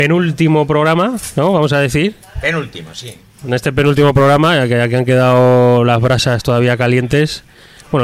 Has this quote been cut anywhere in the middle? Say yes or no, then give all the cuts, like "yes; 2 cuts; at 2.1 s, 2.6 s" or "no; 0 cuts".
no; 0 cuts